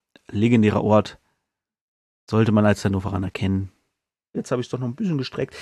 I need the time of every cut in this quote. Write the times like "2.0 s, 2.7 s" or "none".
4.3 s